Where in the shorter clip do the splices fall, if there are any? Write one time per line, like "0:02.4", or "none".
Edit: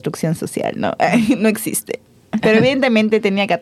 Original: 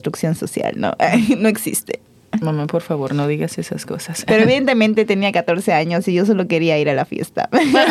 0:02.4